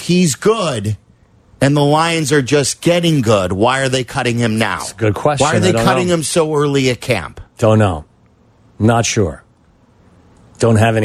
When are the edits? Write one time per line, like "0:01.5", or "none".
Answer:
none